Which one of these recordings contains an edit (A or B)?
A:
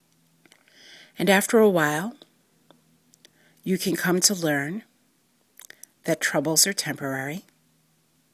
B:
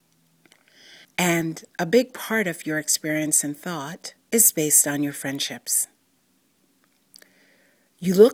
B